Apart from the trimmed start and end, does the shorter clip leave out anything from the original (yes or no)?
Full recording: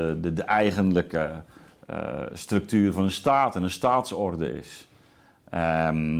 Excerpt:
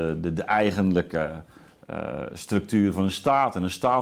no